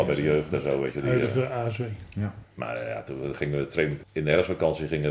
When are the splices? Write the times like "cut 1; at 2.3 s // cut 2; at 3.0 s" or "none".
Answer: cut 1; at 2.4 s // cut 2; at 4.0 s